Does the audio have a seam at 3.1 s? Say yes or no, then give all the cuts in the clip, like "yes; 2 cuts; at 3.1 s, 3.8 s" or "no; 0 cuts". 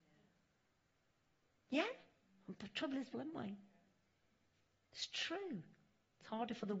yes; 1 cut; at 3.1 s